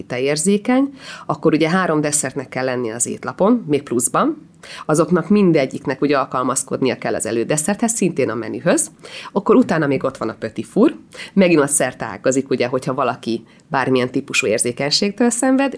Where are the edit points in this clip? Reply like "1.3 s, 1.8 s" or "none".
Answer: none